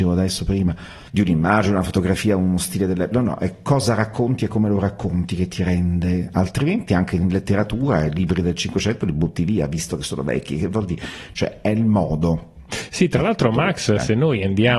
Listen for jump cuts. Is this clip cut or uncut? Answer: uncut